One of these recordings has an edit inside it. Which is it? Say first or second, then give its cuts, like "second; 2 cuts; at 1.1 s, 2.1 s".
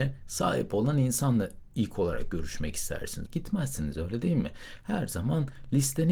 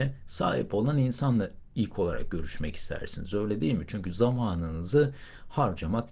first; 1 cut; at 3.3 s